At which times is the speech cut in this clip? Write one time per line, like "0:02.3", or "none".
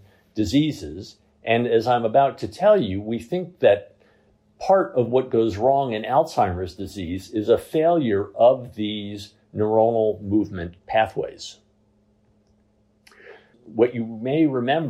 0:13.5